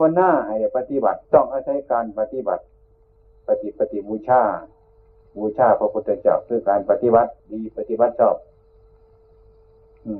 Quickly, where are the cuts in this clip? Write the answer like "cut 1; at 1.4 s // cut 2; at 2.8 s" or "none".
cut 1; at 1.2 s // cut 2; at 7.4 s